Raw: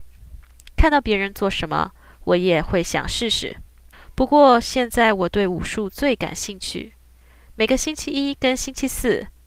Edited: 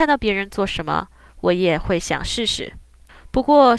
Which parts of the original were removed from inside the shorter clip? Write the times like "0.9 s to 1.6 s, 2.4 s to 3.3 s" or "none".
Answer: none